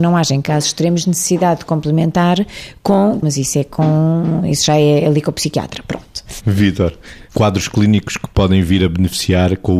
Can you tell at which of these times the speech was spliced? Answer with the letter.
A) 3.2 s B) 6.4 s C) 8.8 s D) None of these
A